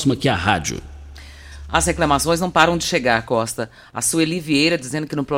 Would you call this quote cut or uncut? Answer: uncut